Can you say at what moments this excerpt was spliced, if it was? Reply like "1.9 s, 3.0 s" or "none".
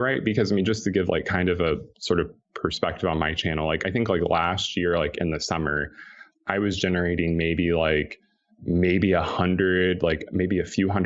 none